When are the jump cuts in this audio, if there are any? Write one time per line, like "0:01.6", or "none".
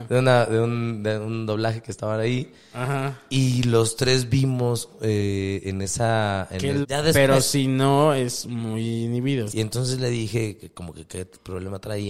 0:06.8
0:09.5